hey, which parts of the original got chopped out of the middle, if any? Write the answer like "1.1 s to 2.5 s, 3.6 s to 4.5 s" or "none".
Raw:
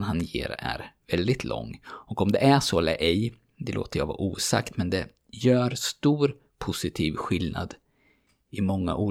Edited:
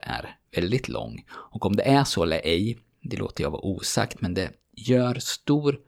none